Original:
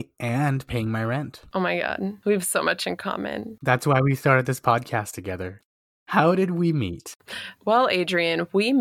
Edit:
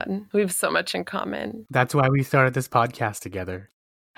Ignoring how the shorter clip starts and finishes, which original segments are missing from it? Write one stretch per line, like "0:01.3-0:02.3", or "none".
none